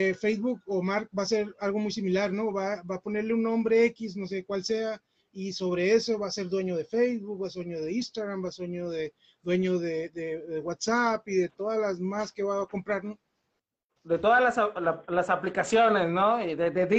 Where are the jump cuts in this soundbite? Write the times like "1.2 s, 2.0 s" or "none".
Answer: none